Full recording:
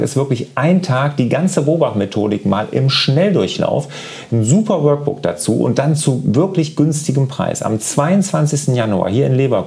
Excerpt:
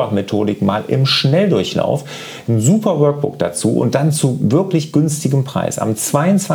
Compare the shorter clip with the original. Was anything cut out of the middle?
no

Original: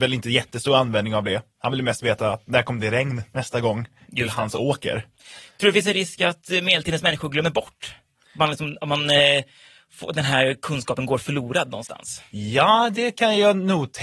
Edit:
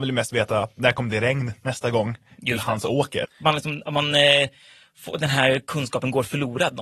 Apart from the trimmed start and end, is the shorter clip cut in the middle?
yes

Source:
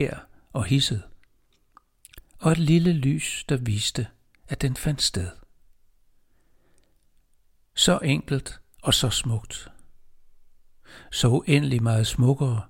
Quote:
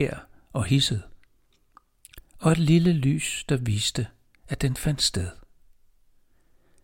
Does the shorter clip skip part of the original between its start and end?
no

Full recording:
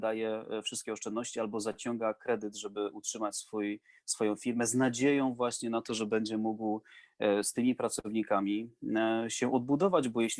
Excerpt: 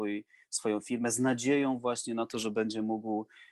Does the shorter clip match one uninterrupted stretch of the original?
yes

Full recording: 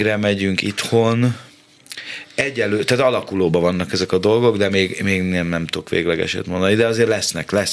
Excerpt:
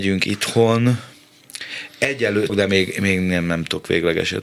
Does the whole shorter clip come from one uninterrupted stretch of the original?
no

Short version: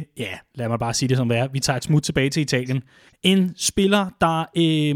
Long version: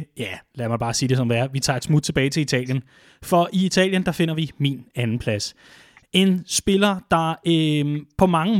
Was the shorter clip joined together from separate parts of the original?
yes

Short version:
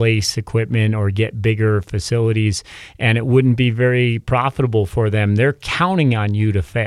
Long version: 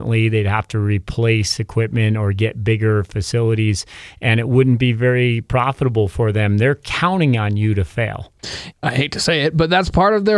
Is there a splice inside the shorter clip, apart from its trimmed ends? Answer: no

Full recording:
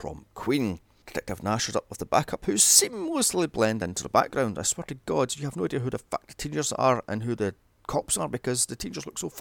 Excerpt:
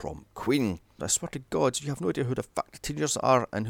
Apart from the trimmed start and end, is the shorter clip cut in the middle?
yes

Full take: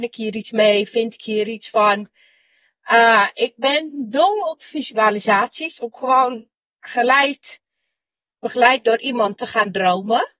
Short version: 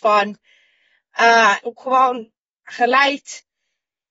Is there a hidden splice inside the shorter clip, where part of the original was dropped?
yes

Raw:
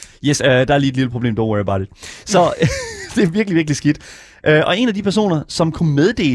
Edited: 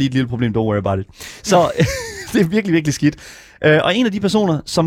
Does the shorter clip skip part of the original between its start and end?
no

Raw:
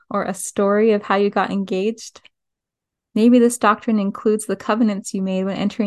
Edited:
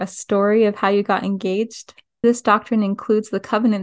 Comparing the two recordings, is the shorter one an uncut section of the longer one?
no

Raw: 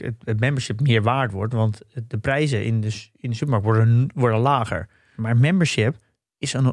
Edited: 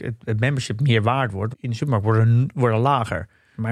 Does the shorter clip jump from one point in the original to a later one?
yes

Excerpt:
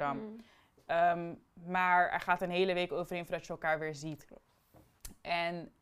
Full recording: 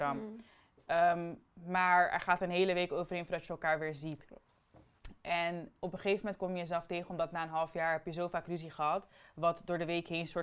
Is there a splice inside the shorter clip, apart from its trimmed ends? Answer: no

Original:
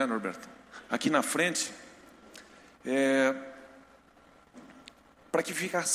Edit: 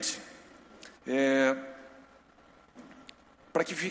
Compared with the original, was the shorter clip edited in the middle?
yes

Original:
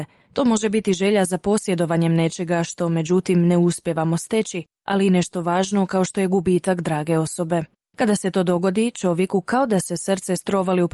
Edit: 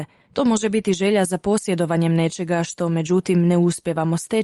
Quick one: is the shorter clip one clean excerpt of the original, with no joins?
yes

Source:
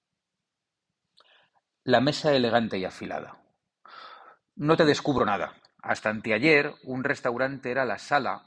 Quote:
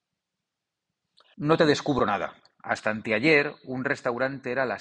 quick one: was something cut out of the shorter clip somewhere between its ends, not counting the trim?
yes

